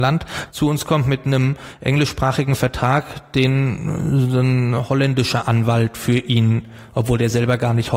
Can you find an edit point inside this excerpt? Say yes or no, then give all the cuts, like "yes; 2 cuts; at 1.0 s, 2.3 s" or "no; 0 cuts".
no; 0 cuts